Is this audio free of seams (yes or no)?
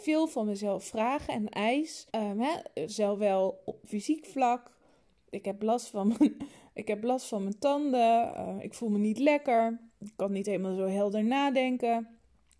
no